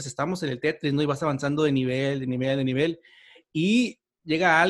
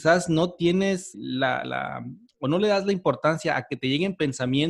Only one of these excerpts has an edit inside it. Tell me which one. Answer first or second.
second